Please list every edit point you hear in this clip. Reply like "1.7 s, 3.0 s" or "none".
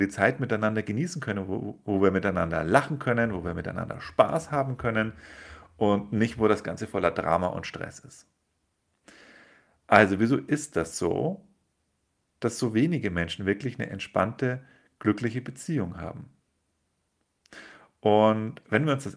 none

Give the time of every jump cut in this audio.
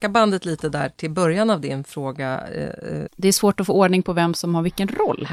3.1 s

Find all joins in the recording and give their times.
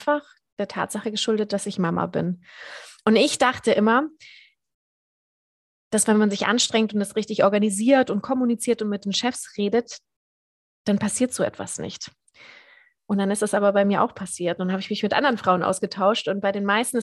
none

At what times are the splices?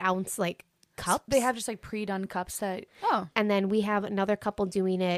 2.9 s

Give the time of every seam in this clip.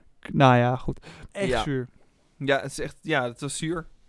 1.3 s

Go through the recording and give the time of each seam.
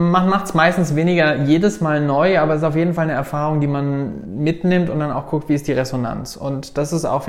none

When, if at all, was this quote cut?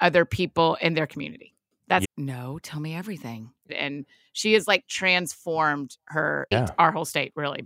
2.0 s, 3.7 s, 6.5 s

